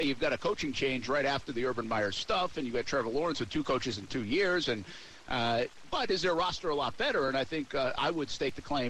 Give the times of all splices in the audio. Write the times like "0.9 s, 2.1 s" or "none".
none